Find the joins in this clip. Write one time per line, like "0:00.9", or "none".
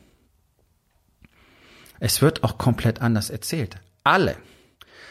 0:01.9